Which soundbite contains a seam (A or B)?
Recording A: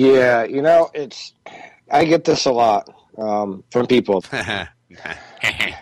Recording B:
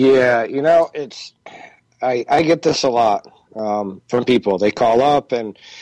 A